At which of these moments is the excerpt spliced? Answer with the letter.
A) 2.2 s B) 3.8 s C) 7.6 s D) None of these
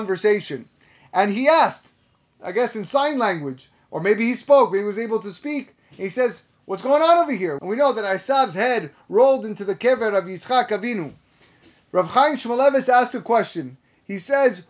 C